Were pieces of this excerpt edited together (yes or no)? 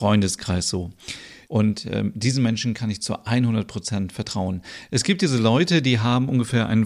yes